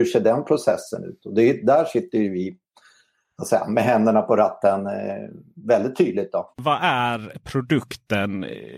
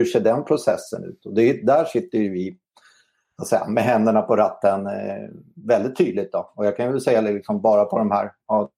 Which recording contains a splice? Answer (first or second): first